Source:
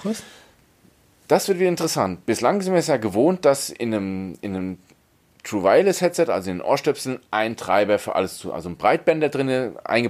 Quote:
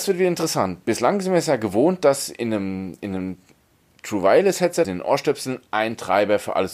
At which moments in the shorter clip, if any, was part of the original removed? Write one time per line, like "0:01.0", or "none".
0:04.8